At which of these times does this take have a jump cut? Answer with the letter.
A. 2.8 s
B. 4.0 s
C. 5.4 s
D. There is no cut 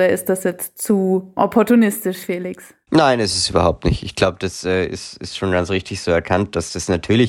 D